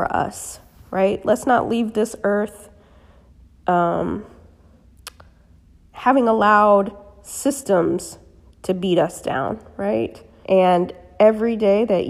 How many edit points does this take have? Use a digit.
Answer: 1